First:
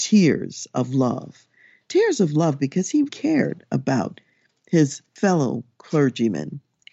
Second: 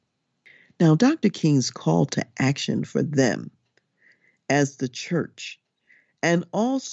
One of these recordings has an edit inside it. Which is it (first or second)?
first